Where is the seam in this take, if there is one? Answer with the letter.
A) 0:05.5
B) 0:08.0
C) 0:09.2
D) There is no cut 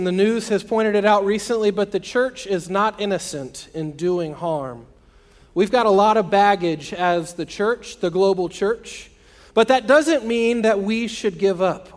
D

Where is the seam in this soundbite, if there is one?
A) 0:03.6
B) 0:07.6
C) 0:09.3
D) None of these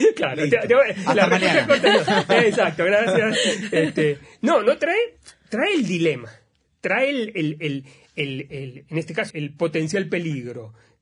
C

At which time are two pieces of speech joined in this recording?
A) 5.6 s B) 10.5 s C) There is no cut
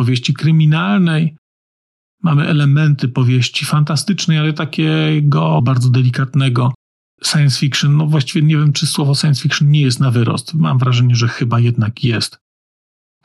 A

